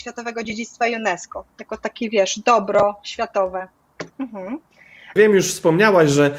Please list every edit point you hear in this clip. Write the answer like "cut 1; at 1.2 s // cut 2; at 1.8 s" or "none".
cut 1; at 4.1 s // cut 2; at 5.2 s